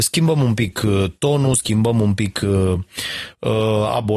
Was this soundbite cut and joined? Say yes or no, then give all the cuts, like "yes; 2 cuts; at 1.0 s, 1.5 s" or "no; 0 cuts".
no; 0 cuts